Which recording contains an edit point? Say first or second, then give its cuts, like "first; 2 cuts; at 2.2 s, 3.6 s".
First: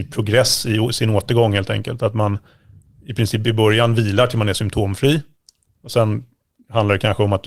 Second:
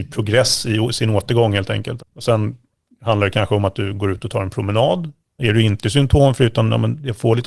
second; 2 cuts; at 2.0 s, 5.4 s